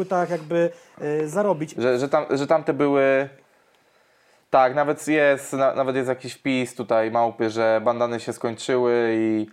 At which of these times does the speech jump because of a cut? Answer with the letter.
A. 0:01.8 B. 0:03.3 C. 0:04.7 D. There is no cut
A